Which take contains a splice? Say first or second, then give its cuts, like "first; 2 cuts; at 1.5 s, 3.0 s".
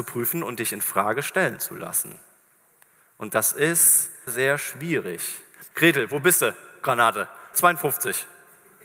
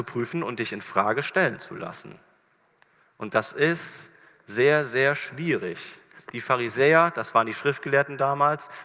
first; 3 cuts; at 4.3 s, 5.7 s, 7.5 s